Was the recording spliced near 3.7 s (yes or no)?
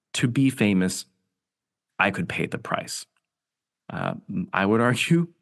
yes